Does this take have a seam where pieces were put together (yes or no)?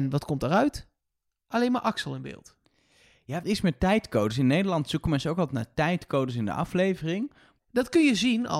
yes